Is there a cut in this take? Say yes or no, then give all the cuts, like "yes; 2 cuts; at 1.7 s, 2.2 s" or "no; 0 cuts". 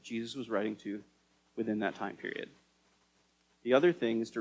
yes; 1 cut; at 3.5 s